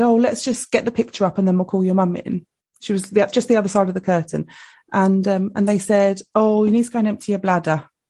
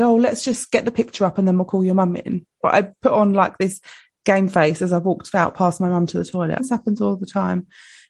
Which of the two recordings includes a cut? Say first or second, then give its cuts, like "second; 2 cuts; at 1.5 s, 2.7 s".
second; 2 cuts; at 2.6 s, 6.6 s